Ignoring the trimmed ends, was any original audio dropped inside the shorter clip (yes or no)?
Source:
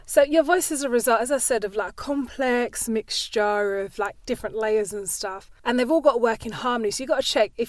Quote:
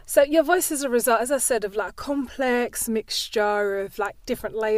no